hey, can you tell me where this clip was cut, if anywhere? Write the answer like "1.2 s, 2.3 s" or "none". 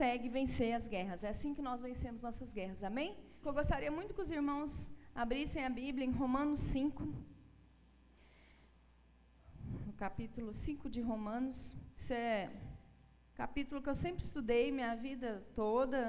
3.4 s, 11.9 s